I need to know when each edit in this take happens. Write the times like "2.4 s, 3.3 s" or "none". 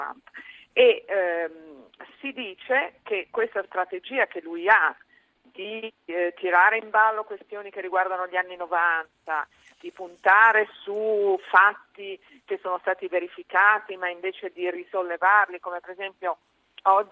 none